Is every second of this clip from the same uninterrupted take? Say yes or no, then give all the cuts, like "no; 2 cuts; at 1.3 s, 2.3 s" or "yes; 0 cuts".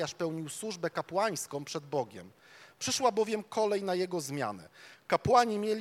yes; 0 cuts